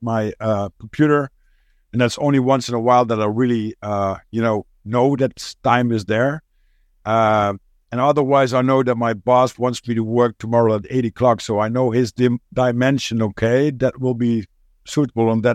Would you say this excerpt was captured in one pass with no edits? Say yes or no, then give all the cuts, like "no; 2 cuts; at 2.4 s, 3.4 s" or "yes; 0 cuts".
yes; 0 cuts